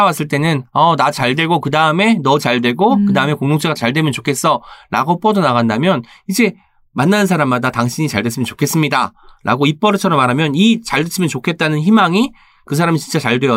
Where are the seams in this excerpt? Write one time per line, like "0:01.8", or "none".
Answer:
0:03.8

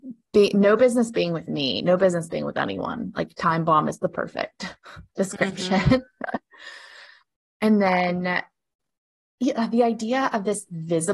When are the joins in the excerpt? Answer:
none

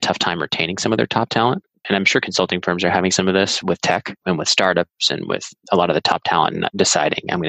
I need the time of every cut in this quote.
0:01.8
0:04.2

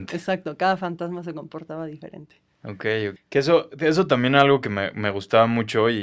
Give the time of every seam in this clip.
0:03.2

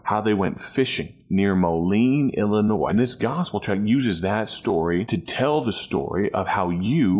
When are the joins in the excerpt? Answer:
0:02.9

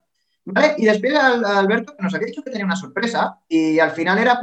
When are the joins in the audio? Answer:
none

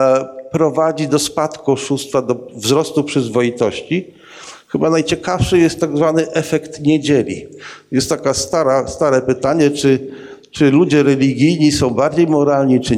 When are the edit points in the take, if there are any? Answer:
none

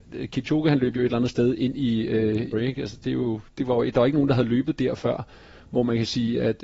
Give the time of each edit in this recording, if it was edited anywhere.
0:02.5

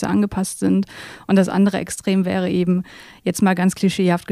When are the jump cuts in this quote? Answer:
none

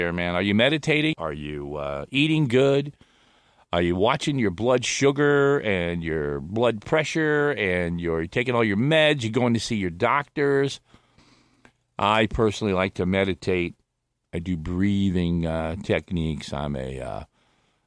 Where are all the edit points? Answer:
0:01.1

